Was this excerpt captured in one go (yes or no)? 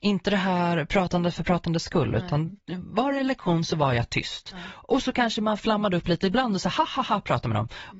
yes